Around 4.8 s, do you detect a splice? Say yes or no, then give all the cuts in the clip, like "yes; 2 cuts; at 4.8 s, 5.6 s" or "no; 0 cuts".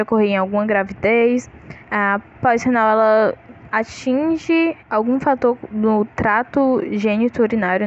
yes; 2 cuts; at 1.8 s, 4.8 s